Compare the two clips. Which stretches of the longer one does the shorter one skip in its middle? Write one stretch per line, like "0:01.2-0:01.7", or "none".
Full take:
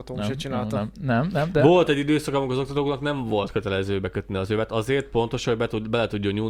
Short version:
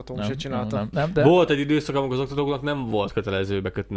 0:00.9-0:01.3